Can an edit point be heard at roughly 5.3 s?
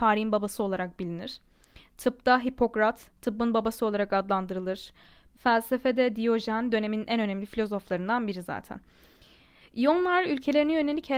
yes; 1 cut; at 5.3 s

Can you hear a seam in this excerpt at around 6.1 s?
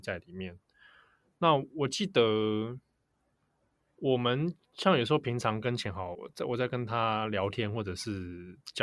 yes; 1 cut; at 6.1 s

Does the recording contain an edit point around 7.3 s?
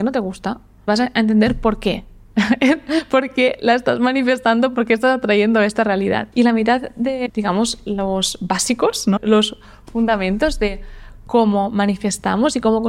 yes; 1 cut; at 7.3 s

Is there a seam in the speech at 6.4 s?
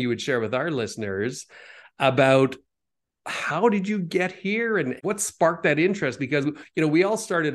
no; 0 cuts

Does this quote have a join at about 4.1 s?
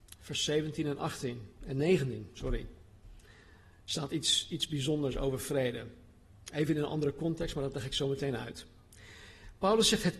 no; 0 cuts

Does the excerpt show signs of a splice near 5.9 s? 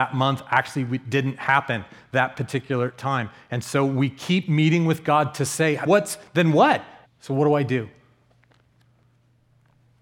yes; 2 cuts; at 5.9 s, 7.0 s

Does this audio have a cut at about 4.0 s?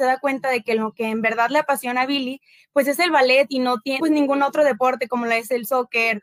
yes; 1 cut; at 4.0 s

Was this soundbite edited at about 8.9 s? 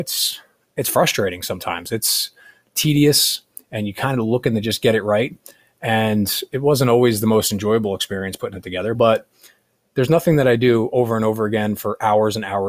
yes; 1 cut; at 8.9 s

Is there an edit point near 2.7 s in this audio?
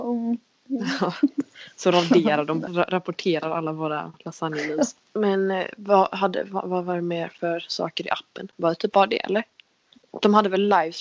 yes; 1 cut; at 2.7 s

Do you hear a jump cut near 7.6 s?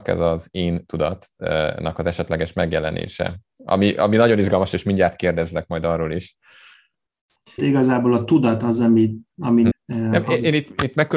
yes; 2 cuts; at 7.6 s, 9.7 s

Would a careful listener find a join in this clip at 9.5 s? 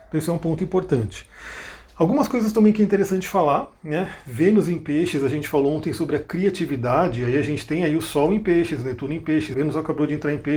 yes; 1 cut; at 9.5 s

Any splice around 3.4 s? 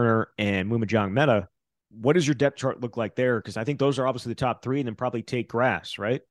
no; 0 cuts

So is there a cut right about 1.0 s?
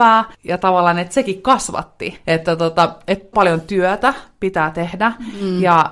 no; 1 cut; at 3.3 s

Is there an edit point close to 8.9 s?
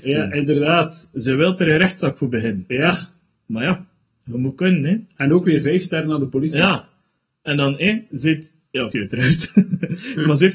yes; 1 cut; at 8.9 s

